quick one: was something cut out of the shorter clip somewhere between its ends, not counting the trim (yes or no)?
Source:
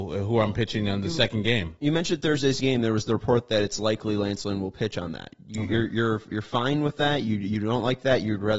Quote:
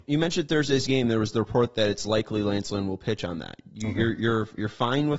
no